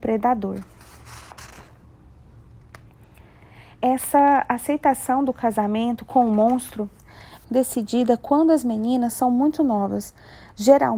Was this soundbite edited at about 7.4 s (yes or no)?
yes